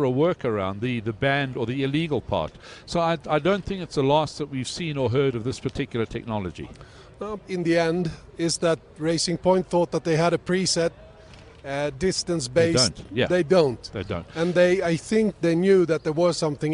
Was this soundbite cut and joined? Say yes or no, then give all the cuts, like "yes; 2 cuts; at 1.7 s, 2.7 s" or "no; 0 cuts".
yes; 1 cut; at 7.4 s